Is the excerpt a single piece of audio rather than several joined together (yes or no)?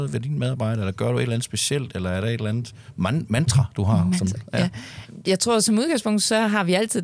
no